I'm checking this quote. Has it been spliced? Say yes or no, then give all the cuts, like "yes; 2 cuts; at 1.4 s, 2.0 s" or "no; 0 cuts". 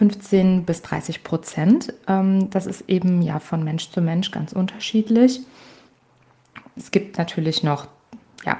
yes; 1 cut; at 6.8 s